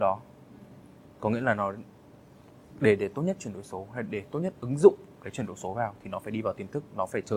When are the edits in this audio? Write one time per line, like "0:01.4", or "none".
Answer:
none